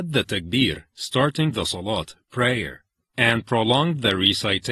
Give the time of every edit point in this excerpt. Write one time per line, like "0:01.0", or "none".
none